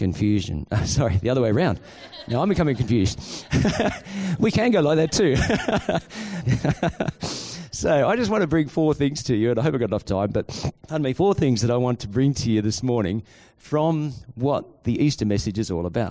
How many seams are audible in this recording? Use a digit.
2